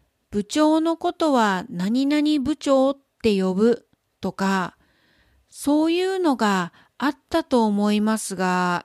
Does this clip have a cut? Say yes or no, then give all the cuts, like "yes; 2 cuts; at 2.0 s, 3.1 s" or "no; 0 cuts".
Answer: no; 0 cuts